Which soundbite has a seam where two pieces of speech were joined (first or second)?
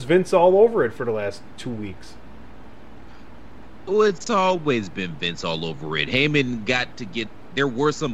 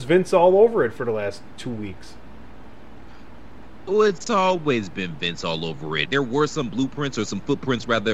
second